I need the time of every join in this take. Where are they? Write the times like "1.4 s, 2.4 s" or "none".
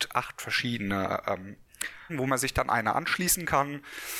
2.1 s